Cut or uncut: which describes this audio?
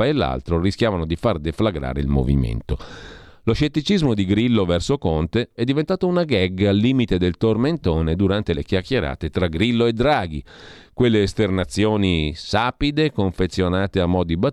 cut